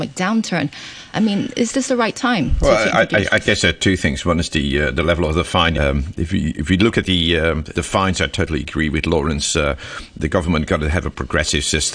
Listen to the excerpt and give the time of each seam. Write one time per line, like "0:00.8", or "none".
0:01.1
0:05.7
0:07.7